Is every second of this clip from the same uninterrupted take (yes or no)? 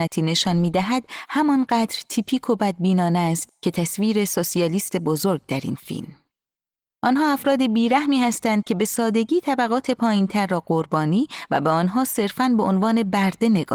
yes